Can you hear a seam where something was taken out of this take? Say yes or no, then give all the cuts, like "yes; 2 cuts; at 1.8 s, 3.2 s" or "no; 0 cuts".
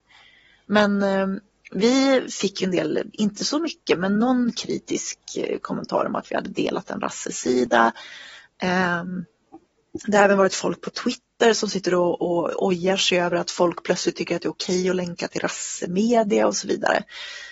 no; 0 cuts